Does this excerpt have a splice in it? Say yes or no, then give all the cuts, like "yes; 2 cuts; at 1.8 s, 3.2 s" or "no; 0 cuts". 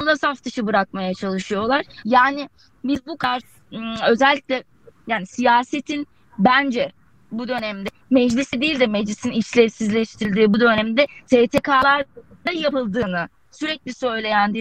yes; 1 cut; at 2.0 s